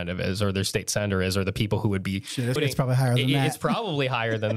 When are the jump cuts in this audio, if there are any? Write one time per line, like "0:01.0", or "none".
0:02.6